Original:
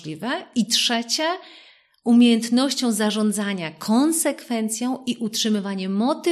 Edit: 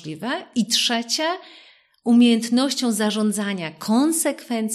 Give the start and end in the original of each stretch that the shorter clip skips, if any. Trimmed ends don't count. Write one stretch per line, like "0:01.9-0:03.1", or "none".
none